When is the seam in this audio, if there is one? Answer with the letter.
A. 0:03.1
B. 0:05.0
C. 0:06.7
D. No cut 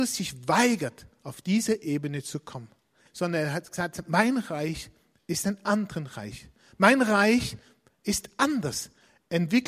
A